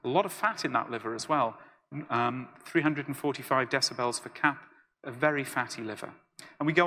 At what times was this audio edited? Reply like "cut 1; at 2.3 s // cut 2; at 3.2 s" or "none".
none